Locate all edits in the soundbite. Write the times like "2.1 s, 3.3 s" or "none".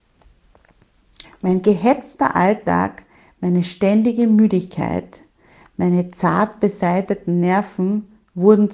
1.2 s